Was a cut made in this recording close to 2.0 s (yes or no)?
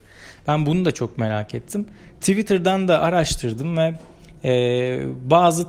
no